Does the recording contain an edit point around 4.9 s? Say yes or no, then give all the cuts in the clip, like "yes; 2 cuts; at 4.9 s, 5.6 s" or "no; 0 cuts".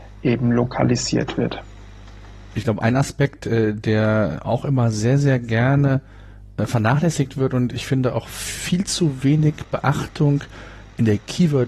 no; 1 cut; at 2.5 s